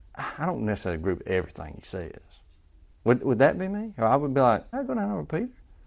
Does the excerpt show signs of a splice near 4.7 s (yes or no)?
yes